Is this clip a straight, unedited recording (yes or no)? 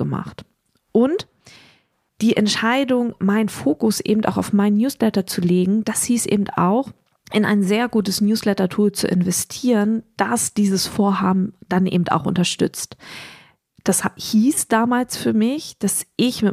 yes